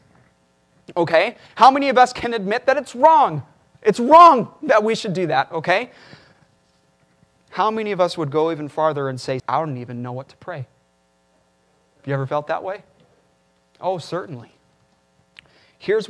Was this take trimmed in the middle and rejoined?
yes; 1 cut; at 9.4 s

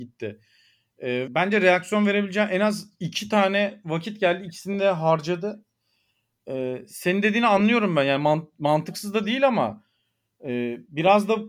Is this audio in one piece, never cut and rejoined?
no; 1 cut; at 1.3 s

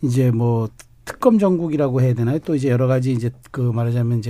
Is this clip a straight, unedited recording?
yes; 0 cuts

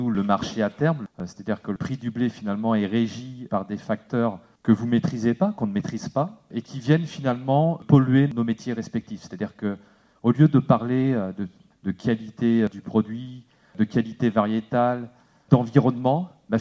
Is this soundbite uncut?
yes; 0 cuts

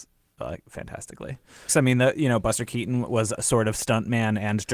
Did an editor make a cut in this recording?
yes; 1 cut; at 1.7 s

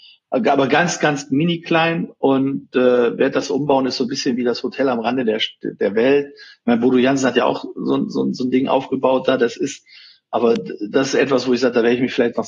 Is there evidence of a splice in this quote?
no; 0 cuts

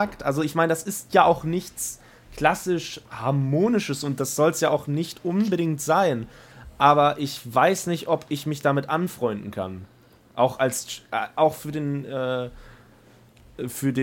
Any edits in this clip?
no; 0 cuts

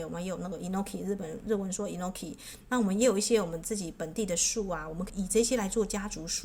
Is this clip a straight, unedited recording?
no; 1 cut; at 5.1 s

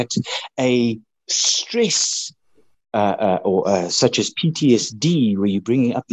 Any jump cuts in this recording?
no; 0 cuts

